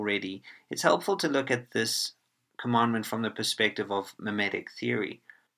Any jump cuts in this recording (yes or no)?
no